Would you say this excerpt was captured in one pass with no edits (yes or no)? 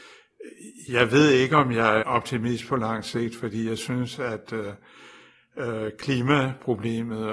no